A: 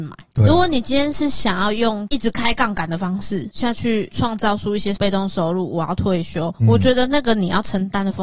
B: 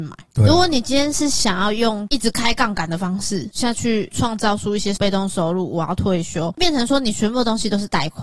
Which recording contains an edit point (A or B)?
B